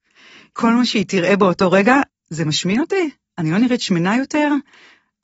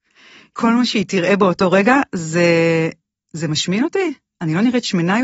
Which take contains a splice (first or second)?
first